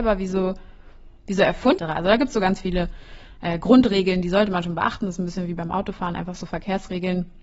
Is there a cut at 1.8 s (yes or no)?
yes